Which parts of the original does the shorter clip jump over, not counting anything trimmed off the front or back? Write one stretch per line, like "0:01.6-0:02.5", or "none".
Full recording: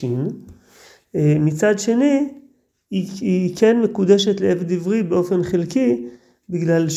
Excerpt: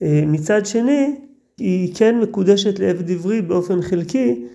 0:02.7-0:03.2